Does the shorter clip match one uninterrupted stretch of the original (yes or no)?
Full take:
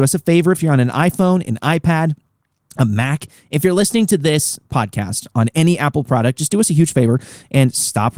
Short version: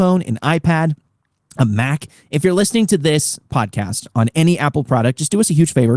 yes